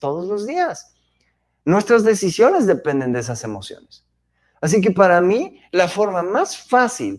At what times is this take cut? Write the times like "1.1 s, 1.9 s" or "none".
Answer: none